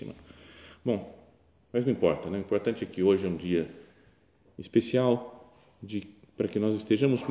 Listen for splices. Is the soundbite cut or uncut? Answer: uncut